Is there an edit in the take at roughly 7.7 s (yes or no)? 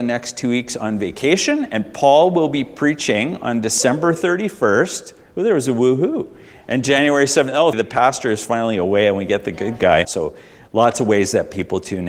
yes